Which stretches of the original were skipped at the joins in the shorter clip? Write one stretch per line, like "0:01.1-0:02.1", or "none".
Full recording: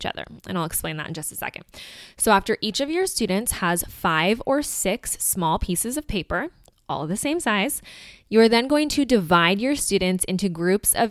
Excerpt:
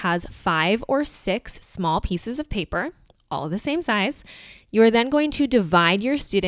none